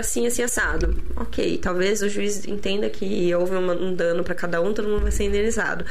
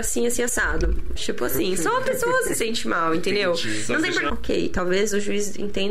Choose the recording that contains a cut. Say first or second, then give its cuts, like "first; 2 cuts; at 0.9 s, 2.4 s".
second; 2 cuts; at 1.2 s, 4.3 s